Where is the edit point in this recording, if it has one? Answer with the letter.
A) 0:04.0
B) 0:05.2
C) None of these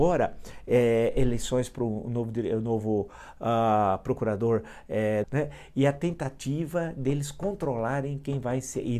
B